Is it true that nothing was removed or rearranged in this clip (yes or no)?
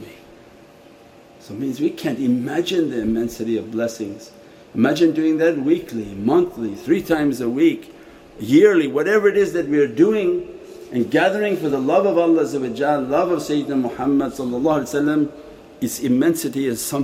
yes